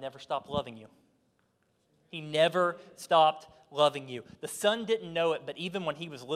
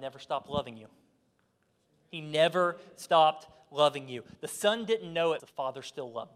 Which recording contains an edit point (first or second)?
second